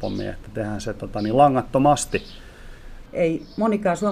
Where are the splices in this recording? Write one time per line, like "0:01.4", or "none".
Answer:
0:03.1

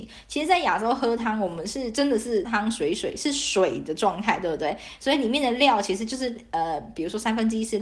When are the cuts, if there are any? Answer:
0:02.4

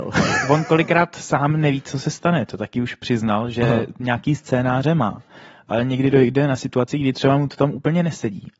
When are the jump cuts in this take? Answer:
none

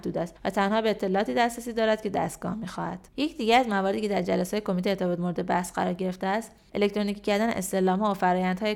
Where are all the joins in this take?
0:03.1

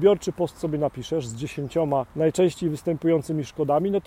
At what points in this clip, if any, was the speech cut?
0:02.1

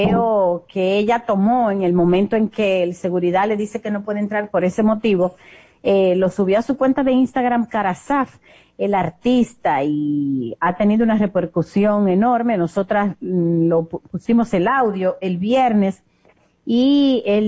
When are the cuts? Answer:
none

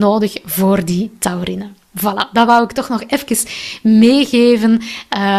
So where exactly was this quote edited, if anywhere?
none

